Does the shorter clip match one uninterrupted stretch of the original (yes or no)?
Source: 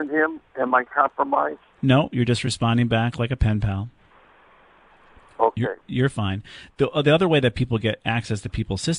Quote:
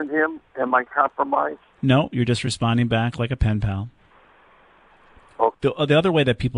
no